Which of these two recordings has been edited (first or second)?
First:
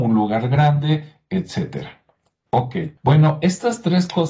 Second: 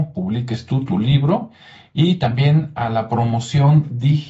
first